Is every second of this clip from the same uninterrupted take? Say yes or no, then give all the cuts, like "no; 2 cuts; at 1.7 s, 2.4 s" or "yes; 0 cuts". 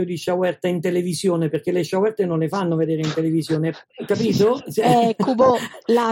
yes; 0 cuts